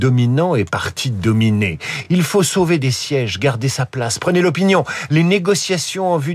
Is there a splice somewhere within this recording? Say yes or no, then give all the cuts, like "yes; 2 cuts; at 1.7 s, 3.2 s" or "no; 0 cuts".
no; 0 cuts